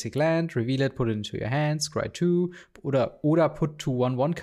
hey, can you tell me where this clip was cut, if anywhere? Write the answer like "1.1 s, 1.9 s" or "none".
none

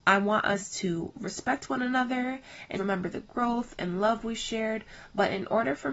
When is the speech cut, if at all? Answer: 2.8 s

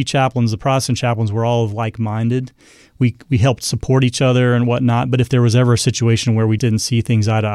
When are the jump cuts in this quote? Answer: 6.6 s

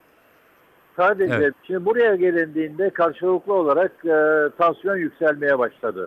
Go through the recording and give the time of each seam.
1.5 s

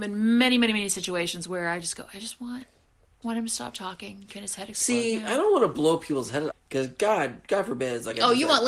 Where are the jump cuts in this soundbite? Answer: 3.2 s, 6.5 s

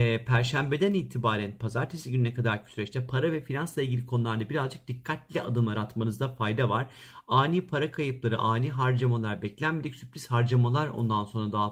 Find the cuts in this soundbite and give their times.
none

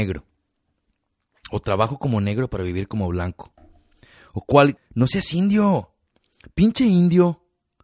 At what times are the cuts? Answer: 4.8 s

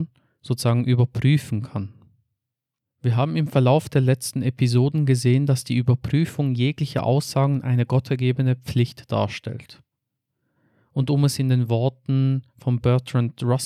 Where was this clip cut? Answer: none

